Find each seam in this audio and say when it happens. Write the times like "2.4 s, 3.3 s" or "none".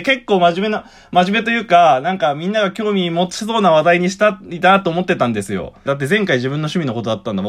5.9 s